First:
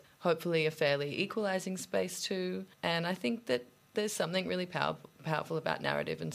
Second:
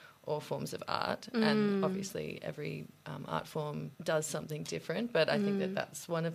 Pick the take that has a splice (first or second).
second